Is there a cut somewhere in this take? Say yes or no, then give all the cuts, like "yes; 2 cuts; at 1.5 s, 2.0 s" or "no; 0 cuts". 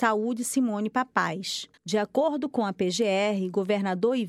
yes; 1 cut; at 1.8 s